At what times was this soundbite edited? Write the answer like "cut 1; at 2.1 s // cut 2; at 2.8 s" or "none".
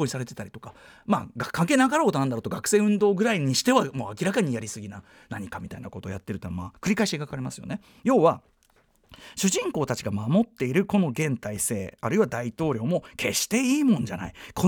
none

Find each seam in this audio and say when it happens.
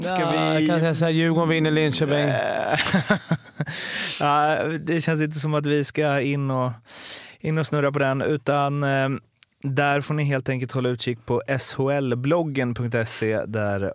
none

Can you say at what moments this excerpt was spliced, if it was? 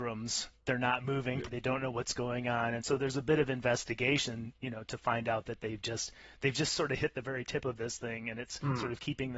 cut 1; at 1.5 s

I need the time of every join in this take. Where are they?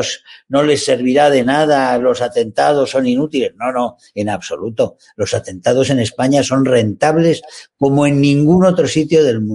none

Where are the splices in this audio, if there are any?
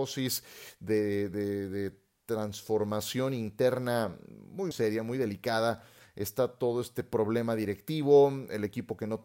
cut 1; at 4.7 s

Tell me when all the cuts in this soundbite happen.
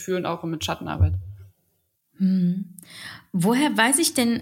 none

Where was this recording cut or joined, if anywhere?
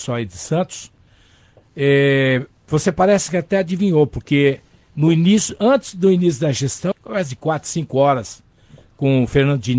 cut 1; at 6.9 s

